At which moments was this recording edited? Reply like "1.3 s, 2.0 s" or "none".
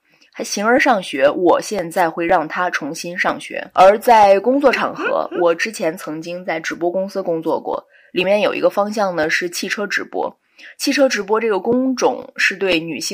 3.7 s